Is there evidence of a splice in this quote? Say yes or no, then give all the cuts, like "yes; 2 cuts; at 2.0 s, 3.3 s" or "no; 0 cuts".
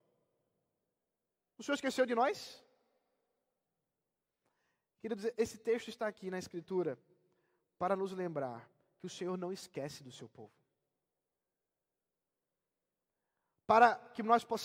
no; 0 cuts